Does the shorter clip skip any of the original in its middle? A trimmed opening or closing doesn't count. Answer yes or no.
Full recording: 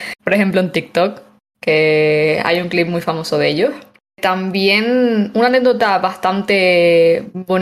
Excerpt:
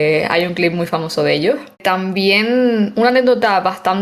yes